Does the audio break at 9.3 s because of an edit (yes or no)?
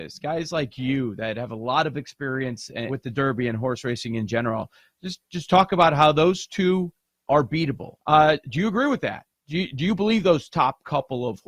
no